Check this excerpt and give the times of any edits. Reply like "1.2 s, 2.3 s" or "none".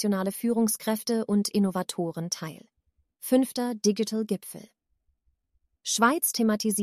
3.1 s